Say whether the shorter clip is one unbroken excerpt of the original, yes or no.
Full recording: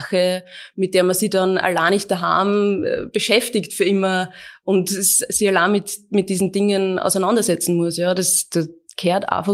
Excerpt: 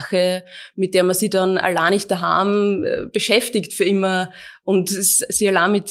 yes